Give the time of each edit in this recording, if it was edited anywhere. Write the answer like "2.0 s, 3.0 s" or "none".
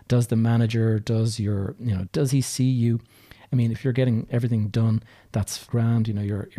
2.1 s, 3.7 s